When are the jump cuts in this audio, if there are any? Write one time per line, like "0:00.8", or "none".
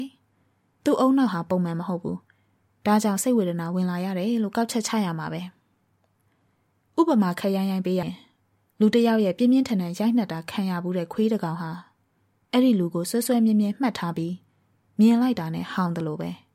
0:08.0